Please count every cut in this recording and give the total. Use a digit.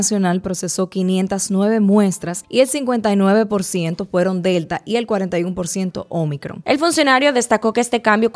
1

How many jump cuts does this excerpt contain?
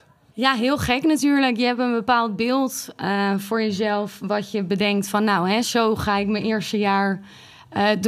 0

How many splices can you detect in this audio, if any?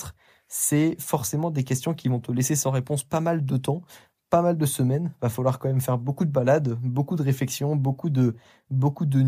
0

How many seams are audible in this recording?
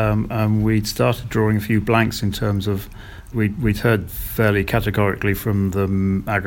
1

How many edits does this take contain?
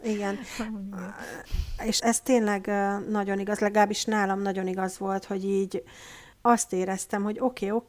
2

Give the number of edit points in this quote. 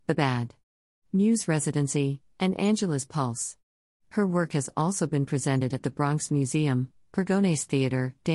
0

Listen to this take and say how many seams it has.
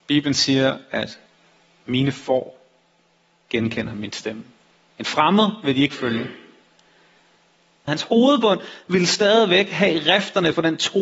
1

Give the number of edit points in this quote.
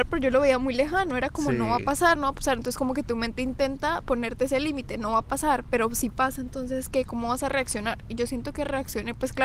1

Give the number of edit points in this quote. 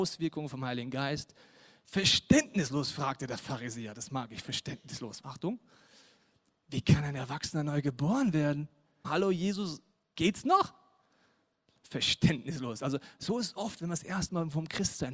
2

